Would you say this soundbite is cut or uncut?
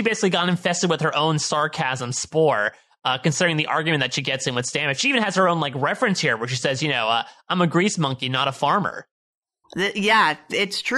cut